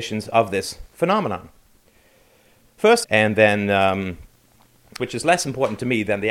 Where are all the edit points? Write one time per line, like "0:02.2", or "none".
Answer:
0:03.0
0:05.0